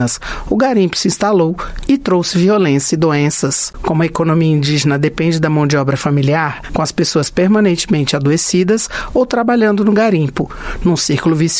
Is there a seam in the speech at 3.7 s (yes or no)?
yes